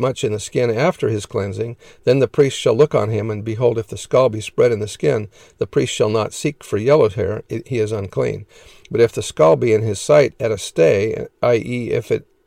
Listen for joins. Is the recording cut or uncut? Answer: uncut